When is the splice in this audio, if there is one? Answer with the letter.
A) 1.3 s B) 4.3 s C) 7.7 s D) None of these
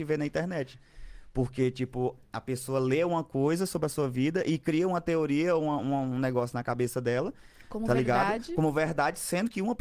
D